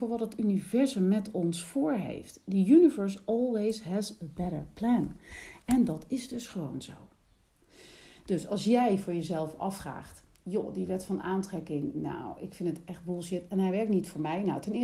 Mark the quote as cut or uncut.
uncut